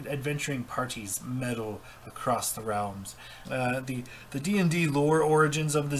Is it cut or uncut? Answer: cut